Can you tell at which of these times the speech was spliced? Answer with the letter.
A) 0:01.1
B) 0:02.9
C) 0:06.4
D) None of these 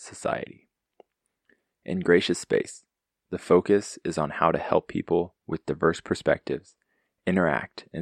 D